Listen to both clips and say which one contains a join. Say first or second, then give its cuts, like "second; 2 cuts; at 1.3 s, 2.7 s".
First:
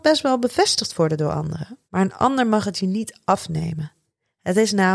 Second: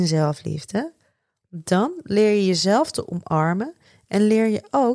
first; 1 cut; at 1.9 s